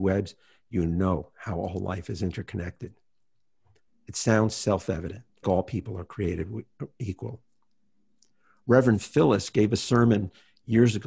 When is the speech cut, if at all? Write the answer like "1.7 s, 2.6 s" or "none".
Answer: 3.9 s, 5.4 s